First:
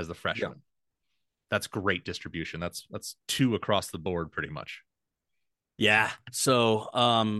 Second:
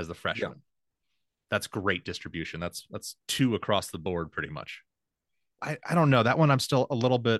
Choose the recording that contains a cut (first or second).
second